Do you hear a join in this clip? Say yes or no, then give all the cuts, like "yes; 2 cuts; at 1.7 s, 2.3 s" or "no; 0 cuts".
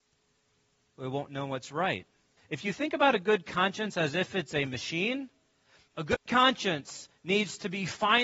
yes; 1 cut; at 2.4 s